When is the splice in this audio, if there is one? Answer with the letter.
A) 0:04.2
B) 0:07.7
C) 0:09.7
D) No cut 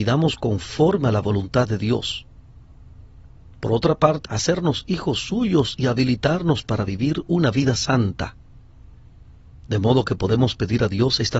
A